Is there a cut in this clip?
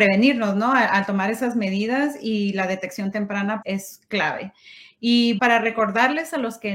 yes; 2 cuts; at 3.6 s, 5.4 s

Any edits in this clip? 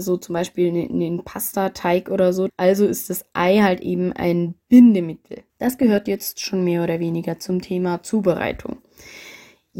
yes; 2 cuts; at 2.5 s, 5.5 s

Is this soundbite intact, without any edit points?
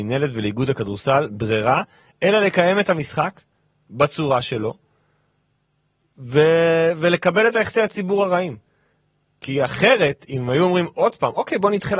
yes; 0 cuts

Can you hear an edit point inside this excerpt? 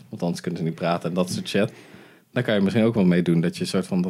no; 0 cuts

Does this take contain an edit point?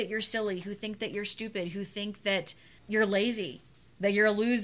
yes; 1 cut; at 2.8 s

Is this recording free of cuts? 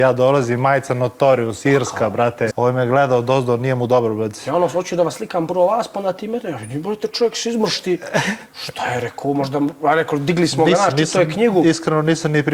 no; 1 cut; at 2.5 s

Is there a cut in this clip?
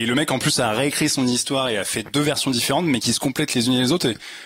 no; 0 cuts

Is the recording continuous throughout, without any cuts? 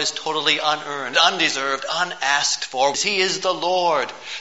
no; 2 cuts; at 1.1 s, 2.9 s

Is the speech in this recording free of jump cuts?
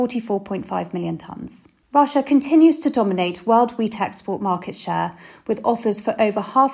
no; 1 cut; at 1.8 s

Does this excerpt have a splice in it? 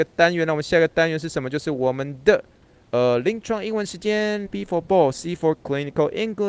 yes; 1 cut; at 4.5 s

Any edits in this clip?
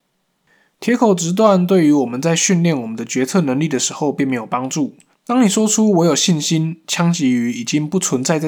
yes; 1 cut; at 5.1 s

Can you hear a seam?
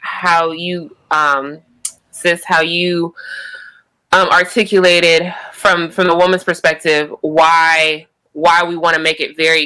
no; 0 cuts

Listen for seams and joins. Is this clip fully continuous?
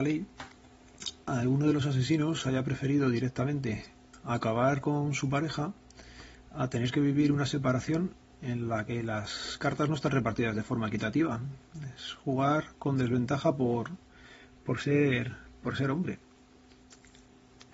yes; 0 cuts

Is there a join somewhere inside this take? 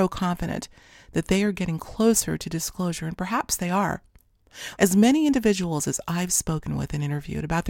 yes; 1 cut; at 4.8 s

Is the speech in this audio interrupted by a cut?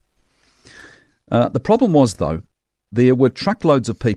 no; 0 cuts

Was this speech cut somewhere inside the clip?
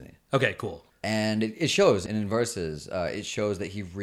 no; 0 cuts

